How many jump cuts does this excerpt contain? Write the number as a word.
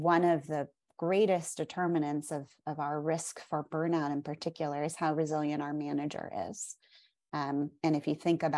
zero